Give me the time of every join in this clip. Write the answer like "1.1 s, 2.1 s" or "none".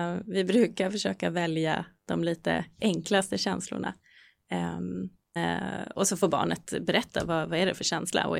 5.4 s